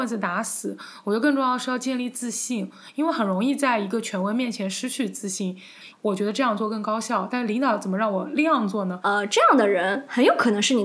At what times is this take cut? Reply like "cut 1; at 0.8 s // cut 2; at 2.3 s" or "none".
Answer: cut 1; at 5.9 s // cut 2; at 9.0 s